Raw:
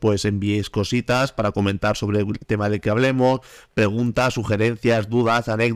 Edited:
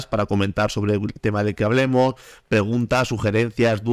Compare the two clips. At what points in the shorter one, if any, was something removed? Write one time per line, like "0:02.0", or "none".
none